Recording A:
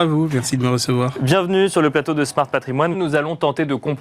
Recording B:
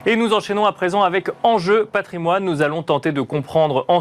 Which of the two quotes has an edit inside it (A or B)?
A